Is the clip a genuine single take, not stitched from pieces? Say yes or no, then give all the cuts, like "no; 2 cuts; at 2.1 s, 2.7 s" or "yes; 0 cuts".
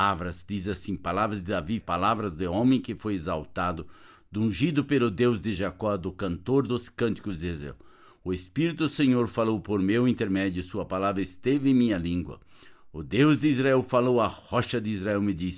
no; 1 cut; at 1.8 s